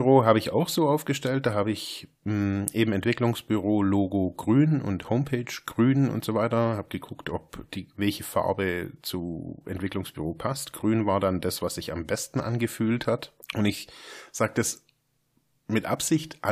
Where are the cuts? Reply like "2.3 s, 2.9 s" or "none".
13.4 s